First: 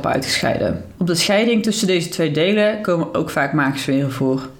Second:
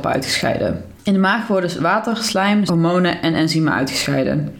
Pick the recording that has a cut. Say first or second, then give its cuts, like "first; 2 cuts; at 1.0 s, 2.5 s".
second; 2 cuts; at 0.9 s, 2.7 s